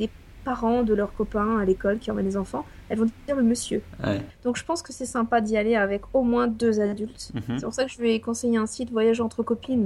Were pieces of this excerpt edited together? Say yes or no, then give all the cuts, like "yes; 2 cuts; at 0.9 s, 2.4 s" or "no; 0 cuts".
yes; 1 cut; at 4.3 s